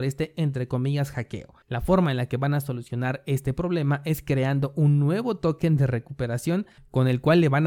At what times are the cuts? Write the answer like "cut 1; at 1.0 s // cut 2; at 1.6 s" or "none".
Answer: cut 1; at 1.6 s